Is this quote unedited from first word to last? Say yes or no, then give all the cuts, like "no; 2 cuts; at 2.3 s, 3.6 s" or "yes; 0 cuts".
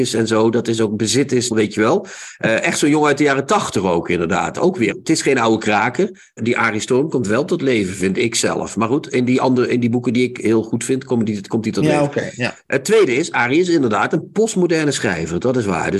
no; 3 cuts; at 1.5 s, 4.9 s, 6.4 s